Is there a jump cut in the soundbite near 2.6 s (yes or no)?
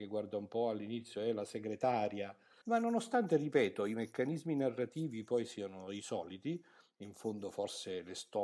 yes